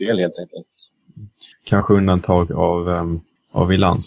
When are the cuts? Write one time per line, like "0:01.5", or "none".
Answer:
0:01.5